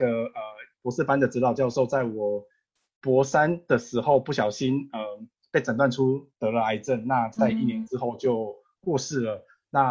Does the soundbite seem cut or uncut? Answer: uncut